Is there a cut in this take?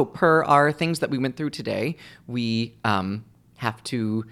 no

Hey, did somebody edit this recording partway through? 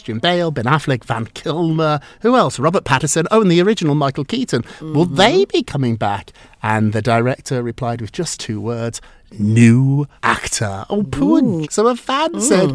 yes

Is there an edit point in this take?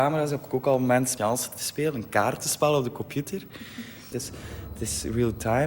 yes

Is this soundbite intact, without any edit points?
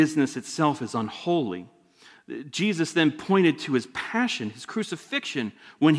yes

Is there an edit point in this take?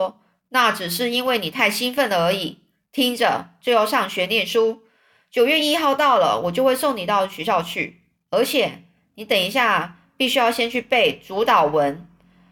yes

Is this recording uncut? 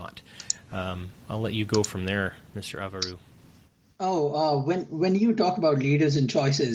yes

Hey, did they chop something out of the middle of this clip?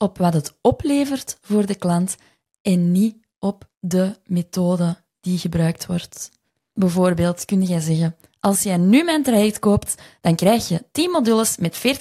no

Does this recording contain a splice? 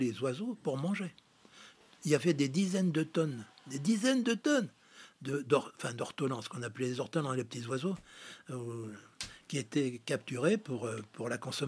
no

